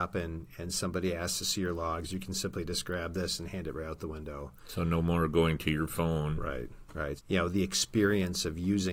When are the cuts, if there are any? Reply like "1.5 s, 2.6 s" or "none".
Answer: 7.2 s